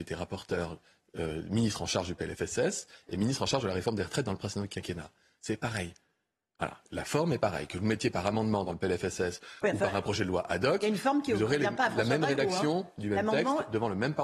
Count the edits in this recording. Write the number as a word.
zero